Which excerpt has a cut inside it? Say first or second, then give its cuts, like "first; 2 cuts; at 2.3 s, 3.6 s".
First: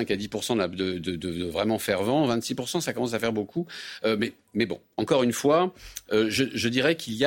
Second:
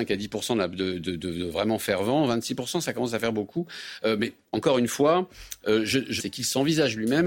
second; 2 cuts; at 4.4 s, 6.2 s